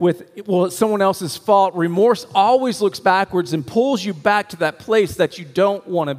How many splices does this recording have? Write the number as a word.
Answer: zero